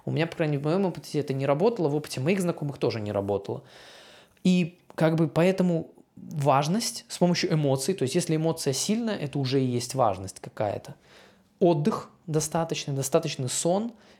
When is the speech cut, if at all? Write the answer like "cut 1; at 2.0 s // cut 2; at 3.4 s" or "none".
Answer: none